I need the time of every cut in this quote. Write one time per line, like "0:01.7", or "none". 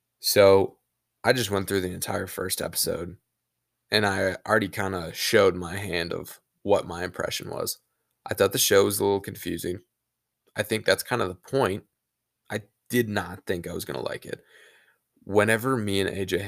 0:12.4